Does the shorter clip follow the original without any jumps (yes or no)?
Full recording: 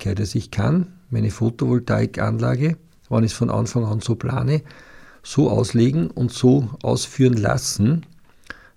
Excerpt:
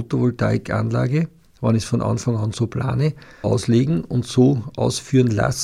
no